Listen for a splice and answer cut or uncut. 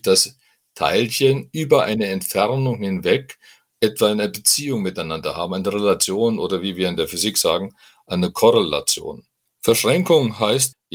uncut